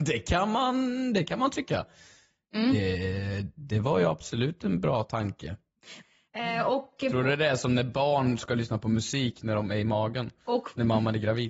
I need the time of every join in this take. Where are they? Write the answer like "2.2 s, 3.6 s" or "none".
6.0 s

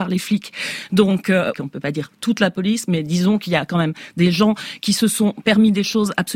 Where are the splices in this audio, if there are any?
1.5 s

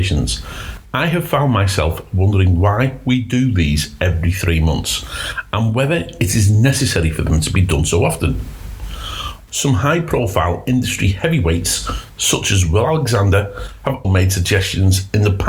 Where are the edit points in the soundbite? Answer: 9.5 s, 14.0 s

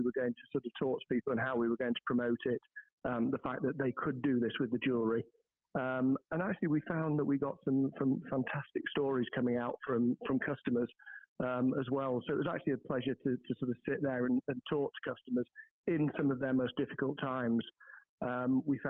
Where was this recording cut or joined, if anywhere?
10.2 s

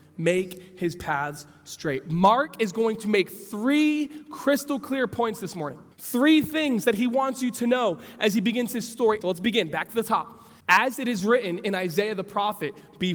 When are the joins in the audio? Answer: 5.9 s, 9.2 s, 10.6 s

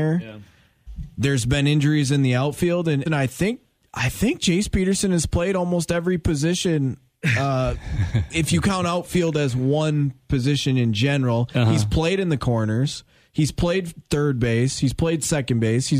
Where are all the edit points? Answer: 3.1 s

